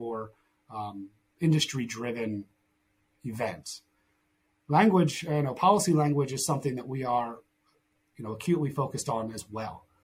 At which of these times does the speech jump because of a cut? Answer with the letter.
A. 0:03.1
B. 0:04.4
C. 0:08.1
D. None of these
D